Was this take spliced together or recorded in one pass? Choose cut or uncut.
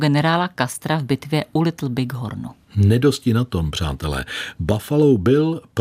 uncut